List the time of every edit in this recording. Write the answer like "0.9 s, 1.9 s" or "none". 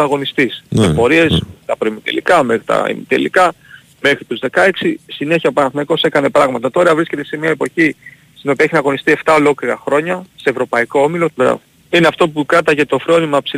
11.3 s